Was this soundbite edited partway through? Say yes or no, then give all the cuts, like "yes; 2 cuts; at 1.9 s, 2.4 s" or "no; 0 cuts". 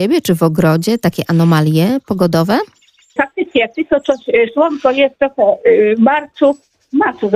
yes; 1 cut; at 3.2 s